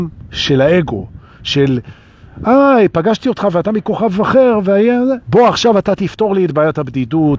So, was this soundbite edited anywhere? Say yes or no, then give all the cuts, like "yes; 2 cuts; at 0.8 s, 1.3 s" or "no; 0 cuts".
yes; 1 cut; at 5.2 s